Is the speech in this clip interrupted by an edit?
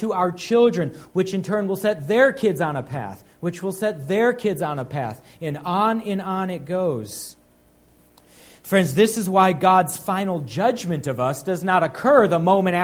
yes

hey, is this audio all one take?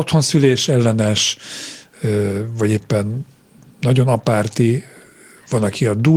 yes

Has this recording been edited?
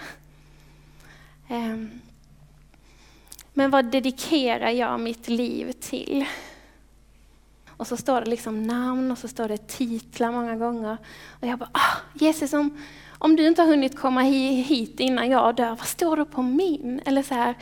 yes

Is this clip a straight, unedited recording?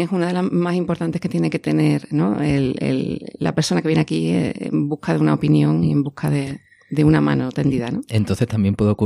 yes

